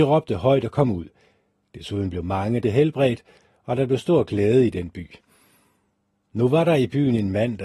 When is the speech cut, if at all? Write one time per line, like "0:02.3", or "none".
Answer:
0:02.6